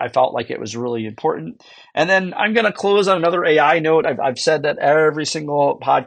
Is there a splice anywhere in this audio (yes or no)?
no